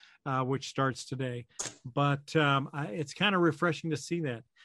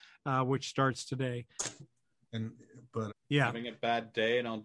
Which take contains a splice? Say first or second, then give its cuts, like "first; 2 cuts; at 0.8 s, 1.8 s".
second; 2 cuts; at 1.8 s, 3.1 s